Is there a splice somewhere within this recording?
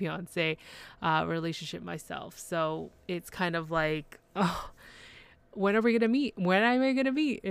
no; 0 cuts

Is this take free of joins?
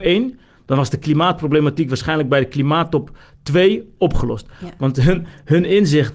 yes; 0 cuts

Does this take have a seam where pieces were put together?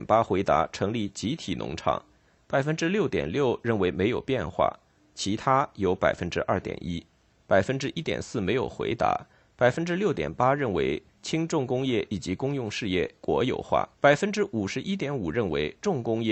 yes; 2 cuts; at 7.3 s, 13.9 s

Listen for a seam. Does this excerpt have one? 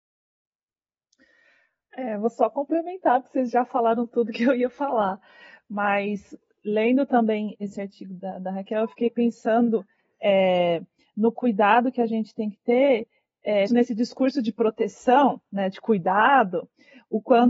yes; 1 cut; at 13.7 s

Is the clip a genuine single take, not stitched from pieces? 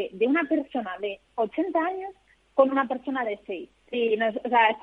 no; 1 cut; at 3.8 s

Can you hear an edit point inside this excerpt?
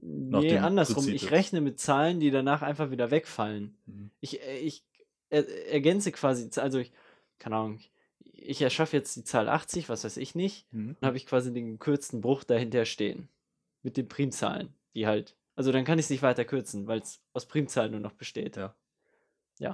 yes; 1 cut; at 11.0 s

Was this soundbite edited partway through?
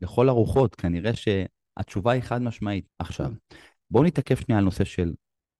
yes; 1 cut; at 2.9 s

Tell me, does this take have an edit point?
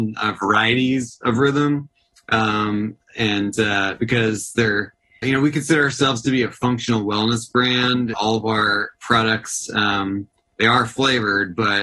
yes; 2 cuts; at 5.2 s, 8.1 s

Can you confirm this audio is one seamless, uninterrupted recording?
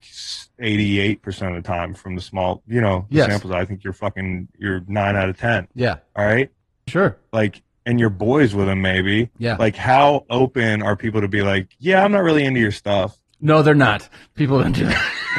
no; 1 cut; at 6.9 s

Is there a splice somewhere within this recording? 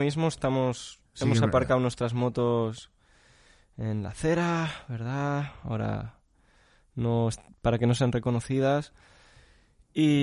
no; 0 cuts

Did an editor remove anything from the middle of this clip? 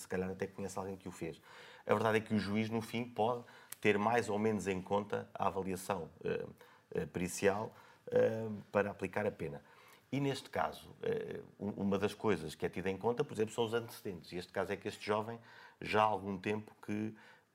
no; 0 cuts

